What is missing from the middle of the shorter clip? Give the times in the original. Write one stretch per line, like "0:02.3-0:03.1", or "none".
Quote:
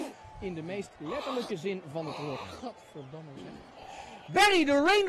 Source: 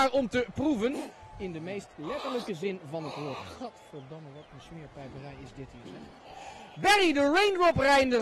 0:04.3-0:05.8